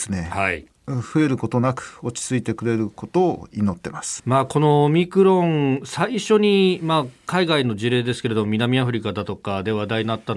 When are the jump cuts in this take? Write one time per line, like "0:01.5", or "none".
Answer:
0:04.2